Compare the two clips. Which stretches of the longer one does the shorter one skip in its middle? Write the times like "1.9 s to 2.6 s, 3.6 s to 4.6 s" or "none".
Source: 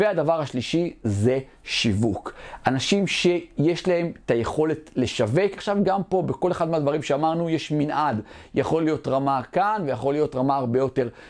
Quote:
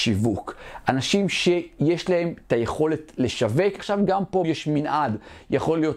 6.2 s to 7.5 s